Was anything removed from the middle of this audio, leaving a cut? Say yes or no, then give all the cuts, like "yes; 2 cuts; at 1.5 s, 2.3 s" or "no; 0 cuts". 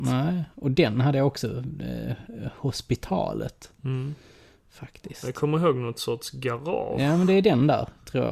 no; 0 cuts